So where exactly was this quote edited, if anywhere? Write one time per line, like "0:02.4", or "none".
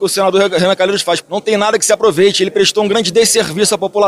0:01.2